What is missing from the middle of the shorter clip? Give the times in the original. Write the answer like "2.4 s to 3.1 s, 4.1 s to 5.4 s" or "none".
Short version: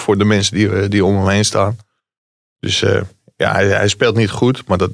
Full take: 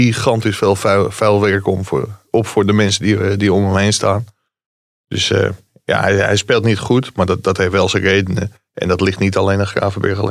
none